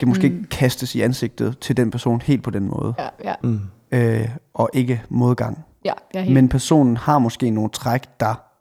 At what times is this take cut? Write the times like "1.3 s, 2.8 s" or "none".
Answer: 3.4 s